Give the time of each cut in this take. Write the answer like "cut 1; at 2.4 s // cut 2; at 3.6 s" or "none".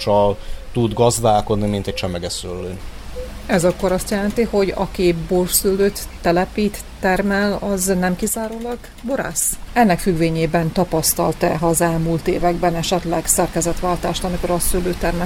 cut 1; at 9.7 s